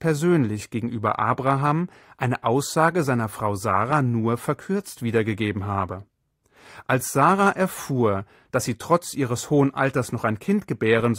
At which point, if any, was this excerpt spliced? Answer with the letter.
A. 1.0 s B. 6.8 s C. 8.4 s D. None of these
D